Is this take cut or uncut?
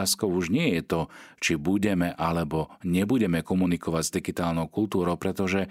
uncut